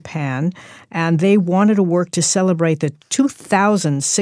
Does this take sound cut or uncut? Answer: uncut